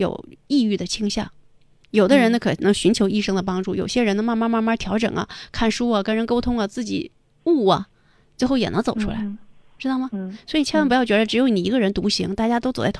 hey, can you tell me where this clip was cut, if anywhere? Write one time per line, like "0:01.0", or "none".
none

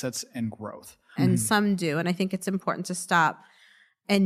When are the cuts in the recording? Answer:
0:01.2

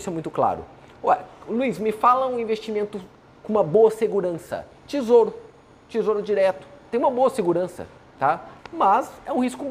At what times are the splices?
0:04.8
0:06.9
0:08.6

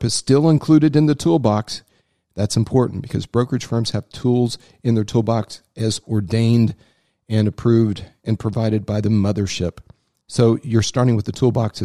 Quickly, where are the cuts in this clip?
none

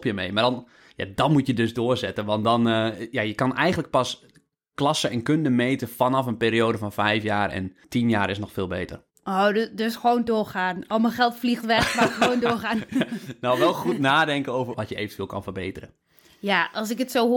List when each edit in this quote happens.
0:07.8
0:14.7

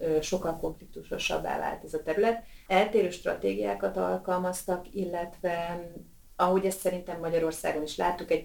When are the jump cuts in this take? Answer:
0:02.7

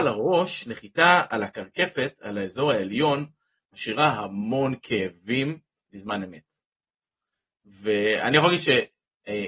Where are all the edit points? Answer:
none

